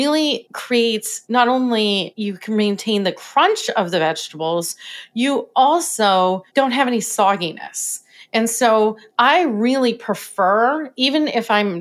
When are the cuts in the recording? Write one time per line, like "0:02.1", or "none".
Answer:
none